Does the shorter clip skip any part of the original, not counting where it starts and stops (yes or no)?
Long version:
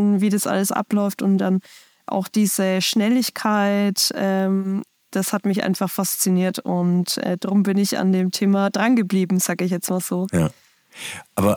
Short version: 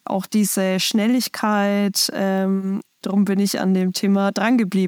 yes